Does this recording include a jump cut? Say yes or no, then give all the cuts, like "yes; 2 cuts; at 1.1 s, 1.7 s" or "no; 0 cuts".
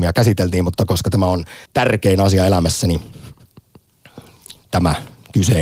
yes; 1 cut; at 1.7 s